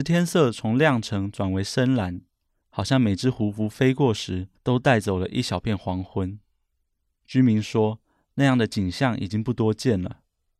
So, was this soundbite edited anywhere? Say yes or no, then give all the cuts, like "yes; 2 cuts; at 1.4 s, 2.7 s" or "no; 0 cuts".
yes; 1 cut; at 4.6 s